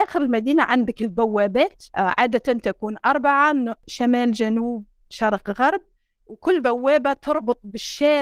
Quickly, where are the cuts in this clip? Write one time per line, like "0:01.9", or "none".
0:01.9